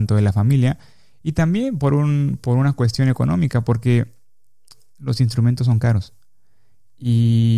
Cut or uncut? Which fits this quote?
uncut